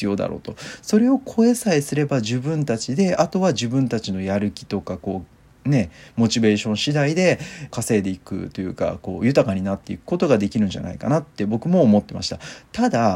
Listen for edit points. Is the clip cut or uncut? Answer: cut